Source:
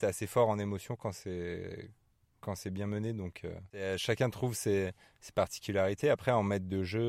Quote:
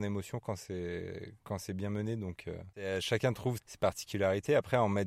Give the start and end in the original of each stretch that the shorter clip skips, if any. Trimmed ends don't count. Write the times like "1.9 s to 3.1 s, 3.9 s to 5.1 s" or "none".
2.0 s to 2.4 s, 4.5 s to 5.1 s

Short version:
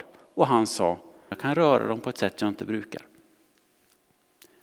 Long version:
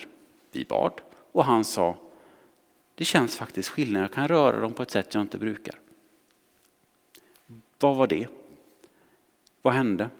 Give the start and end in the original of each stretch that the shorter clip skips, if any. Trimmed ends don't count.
2.3 s to 4.0 s

